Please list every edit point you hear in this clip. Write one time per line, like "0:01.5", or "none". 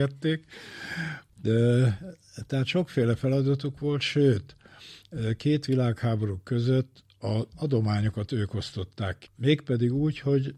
0:09.3